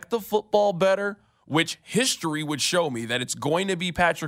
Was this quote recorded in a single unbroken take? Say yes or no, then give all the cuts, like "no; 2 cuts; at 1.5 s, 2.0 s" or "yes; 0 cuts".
yes; 0 cuts